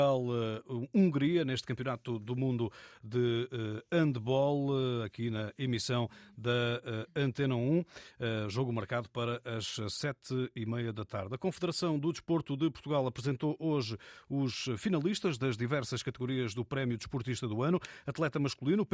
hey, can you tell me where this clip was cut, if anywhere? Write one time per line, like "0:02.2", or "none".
none